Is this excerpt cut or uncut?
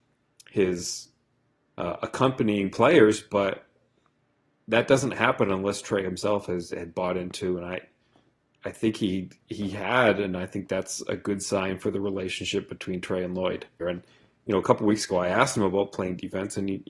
cut